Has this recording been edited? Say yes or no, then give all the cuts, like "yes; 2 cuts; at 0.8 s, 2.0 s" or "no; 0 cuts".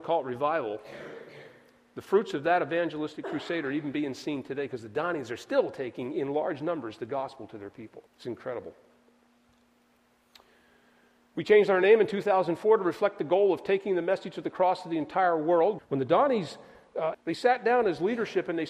yes; 3 cuts; at 8.1 s, 15.8 s, 17.1 s